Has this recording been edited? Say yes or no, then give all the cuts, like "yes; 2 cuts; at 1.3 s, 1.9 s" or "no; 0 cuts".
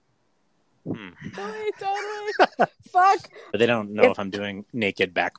yes; 2 cuts; at 1.3 s, 3.5 s